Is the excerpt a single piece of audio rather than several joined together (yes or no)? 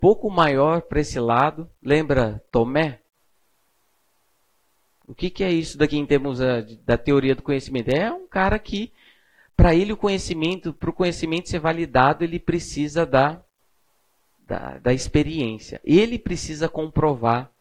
yes